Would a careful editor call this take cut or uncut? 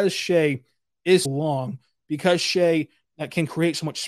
cut